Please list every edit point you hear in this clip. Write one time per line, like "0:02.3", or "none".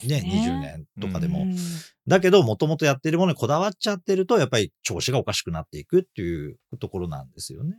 none